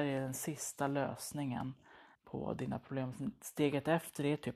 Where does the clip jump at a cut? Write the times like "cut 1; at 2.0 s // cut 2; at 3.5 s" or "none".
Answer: cut 1; at 2.1 s